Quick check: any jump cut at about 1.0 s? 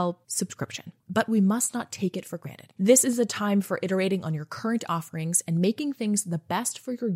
yes; 1 cut; at 1.0 s

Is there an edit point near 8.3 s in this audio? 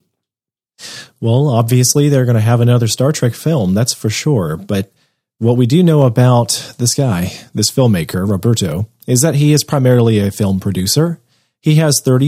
no; 0 cuts

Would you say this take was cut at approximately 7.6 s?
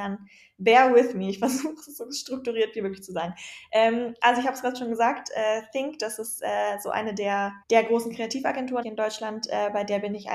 yes; 2 cuts; at 7.6 s, 8.8 s

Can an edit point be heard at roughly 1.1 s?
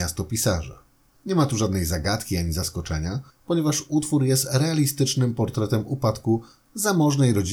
yes; 1 cut; at 1.1 s

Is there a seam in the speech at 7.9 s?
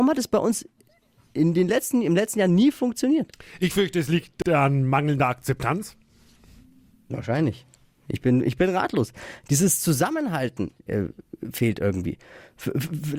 no; 0 cuts

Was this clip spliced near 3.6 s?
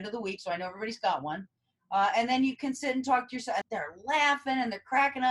yes; 1 cut; at 3.6 s

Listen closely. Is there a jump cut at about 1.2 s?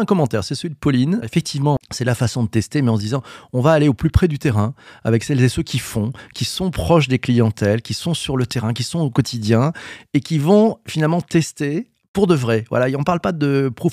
yes; 1 cut; at 1.2 s

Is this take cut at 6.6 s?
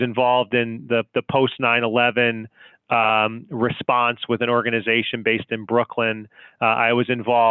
no; 0 cuts

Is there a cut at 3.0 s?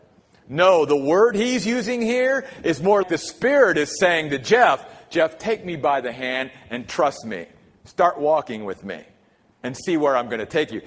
yes; 1 cut; at 3.0 s

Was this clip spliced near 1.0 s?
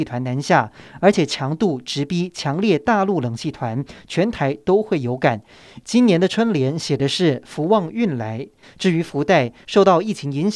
no; 2 cuts; at 5.8 s, 8.6 s

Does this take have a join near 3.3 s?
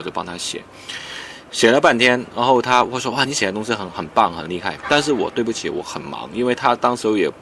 no; 0 cuts

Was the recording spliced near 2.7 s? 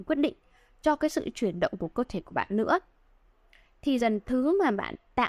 no; 1 cut; at 4.0 s

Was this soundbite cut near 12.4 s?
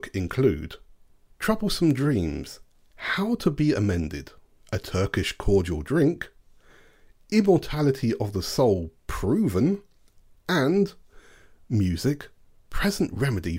no; 1 cut; at 4.6 s

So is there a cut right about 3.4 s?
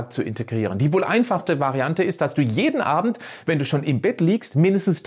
no; 0 cuts

